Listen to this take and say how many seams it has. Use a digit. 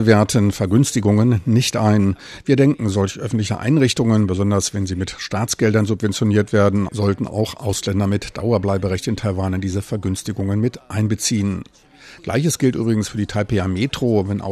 1